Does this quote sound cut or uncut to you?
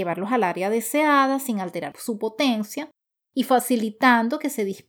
cut